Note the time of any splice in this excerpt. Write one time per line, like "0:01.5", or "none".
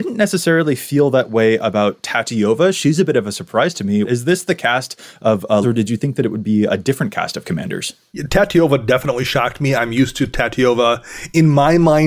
0:04.0
0:05.6